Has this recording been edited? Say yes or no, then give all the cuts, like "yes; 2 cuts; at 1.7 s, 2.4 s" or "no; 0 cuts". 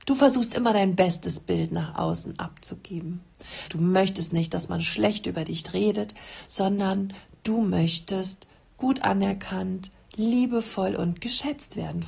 yes; 1 cut; at 3.7 s